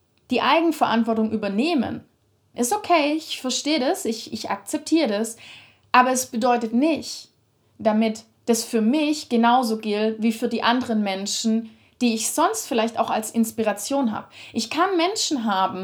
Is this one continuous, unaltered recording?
no; 1 cut; at 2.5 s

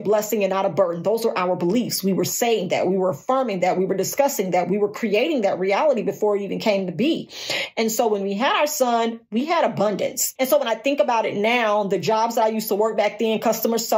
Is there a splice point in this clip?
yes; 1 cut; at 10.4 s

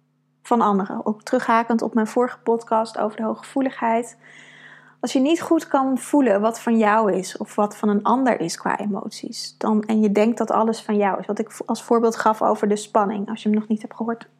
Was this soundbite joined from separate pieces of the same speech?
no; 0 cuts

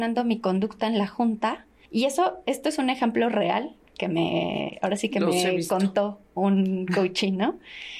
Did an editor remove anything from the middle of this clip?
yes; 1 cut; at 1.9 s

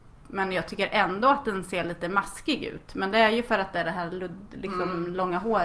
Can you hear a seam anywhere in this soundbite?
no; 0 cuts

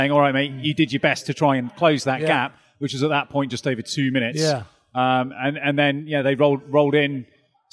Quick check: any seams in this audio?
no; 0 cuts

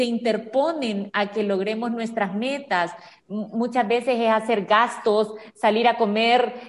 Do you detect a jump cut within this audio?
no; 0 cuts

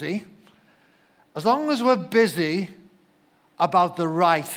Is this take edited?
no; 0 cuts

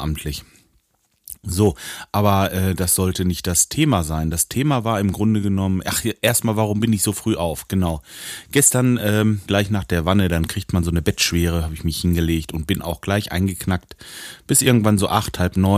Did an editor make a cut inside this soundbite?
yes; 1 cut; at 9.5 s

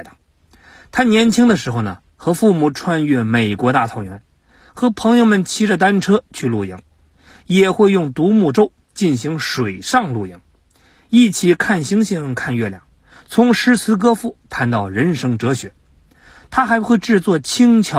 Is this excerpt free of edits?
yes; 0 cuts

